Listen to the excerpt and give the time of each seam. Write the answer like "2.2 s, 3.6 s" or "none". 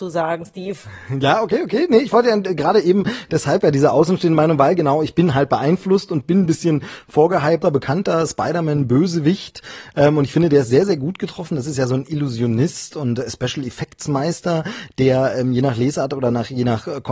7.6 s